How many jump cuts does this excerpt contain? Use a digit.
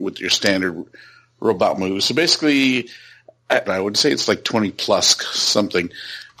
1